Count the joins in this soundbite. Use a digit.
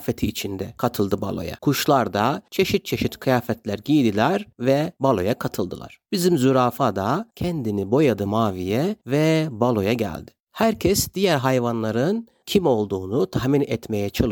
1